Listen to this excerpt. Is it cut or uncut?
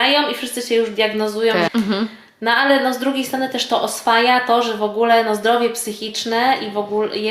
cut